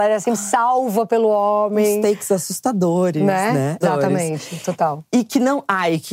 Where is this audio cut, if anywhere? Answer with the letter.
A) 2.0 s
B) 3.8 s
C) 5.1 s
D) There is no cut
B